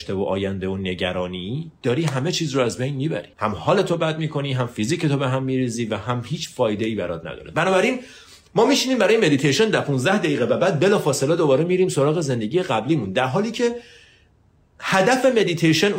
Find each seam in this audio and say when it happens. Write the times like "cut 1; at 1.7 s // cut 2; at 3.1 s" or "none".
cut 1; at 3.3 s